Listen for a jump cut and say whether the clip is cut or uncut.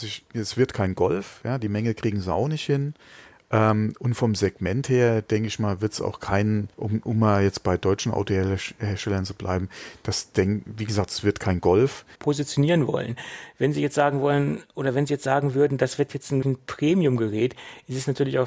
cut